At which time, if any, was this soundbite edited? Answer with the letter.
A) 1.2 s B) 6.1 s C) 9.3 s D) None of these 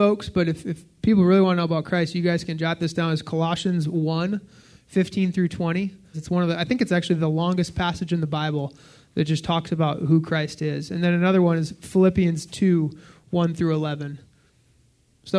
B